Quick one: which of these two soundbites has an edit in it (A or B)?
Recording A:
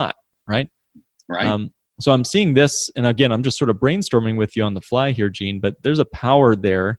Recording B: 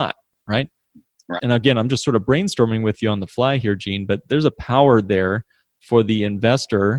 B